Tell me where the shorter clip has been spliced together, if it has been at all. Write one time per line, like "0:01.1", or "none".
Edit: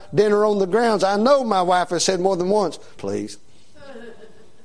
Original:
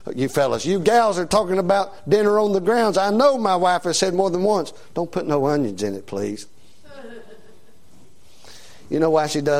0:03.0